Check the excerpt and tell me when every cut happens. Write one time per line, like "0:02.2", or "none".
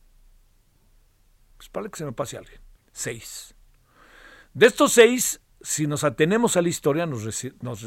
0:02.8
0:05.5